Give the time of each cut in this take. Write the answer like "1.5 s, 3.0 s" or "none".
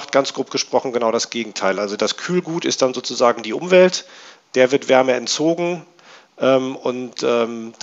none